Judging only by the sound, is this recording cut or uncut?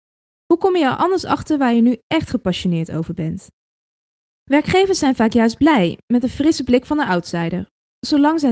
uncut